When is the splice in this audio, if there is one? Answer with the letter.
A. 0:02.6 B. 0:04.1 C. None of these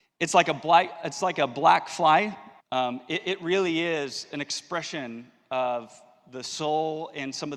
A